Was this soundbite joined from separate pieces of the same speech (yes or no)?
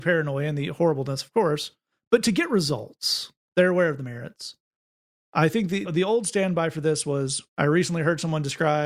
yes